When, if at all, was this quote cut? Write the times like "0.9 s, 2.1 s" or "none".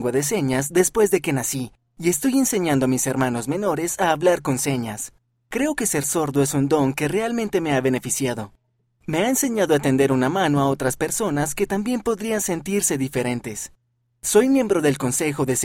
none